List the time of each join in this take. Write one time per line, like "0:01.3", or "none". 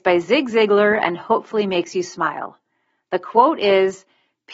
none